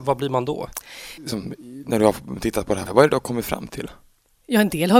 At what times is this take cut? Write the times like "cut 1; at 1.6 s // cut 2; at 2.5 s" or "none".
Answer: cut 1; at 1.2 s // cut 2; at 2.9 s